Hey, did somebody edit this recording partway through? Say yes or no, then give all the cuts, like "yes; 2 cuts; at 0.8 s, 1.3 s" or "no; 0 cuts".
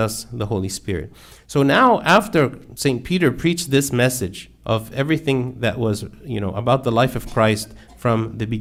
no; 0 cuts